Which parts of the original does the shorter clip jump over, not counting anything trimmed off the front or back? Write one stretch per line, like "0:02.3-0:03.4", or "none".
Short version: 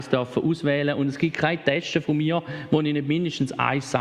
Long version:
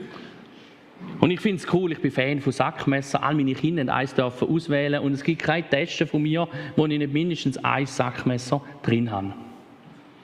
none

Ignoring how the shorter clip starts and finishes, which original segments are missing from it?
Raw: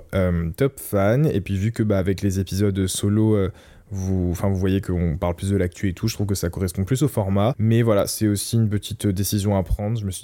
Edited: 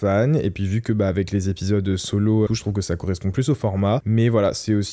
0:03.4-0:06.0

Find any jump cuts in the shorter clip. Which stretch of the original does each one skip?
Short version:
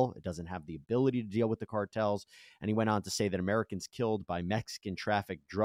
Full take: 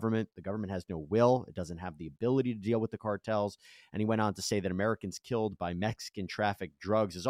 none

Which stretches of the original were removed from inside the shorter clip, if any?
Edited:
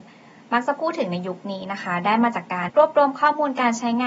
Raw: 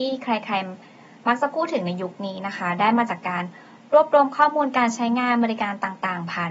0:03.4-0:03.8

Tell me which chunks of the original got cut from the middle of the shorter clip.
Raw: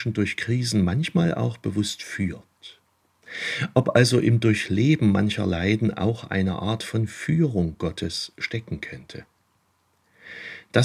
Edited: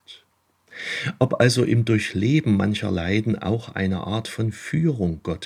none

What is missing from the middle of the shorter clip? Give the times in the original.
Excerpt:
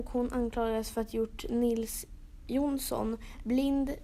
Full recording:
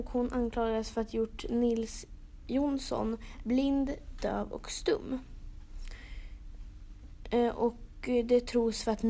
none

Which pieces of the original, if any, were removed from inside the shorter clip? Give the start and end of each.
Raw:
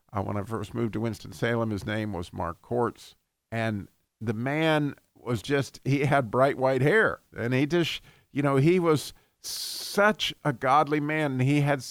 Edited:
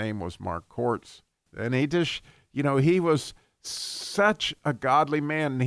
0:03.4-0:07.3

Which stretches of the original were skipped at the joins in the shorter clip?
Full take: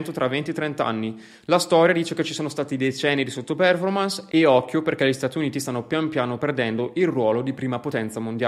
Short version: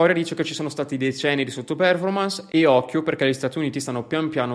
none

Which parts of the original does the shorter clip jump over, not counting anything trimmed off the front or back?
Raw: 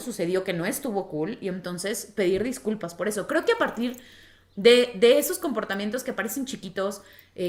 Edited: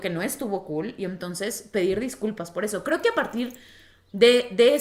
none

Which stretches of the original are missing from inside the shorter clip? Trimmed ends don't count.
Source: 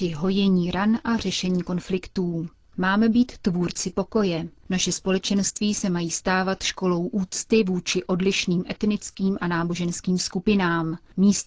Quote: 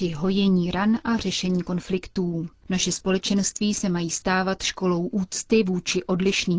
0:02.6-0:04.6

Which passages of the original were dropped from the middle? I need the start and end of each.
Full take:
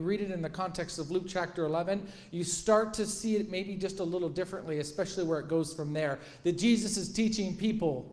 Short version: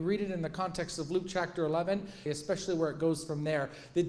0:02.3-0:04.8

